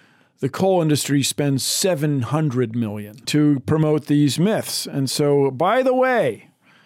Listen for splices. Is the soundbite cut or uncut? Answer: cut